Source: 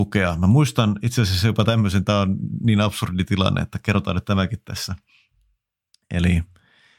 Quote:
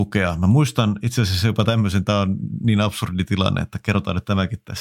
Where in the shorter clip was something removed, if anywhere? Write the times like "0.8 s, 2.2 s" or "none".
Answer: none

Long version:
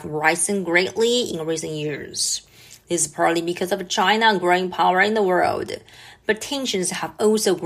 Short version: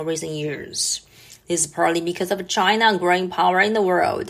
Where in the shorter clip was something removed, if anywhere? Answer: none

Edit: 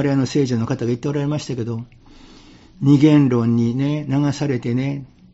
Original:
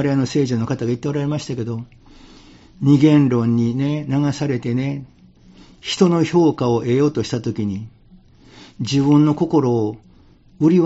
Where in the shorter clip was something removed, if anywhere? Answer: none

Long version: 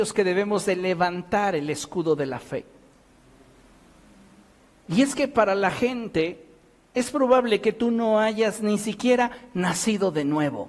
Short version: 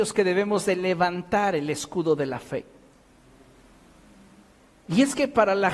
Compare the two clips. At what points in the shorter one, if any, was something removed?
none

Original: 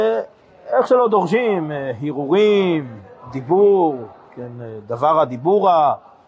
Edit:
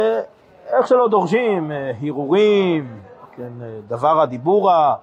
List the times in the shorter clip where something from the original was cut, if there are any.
3.2 s

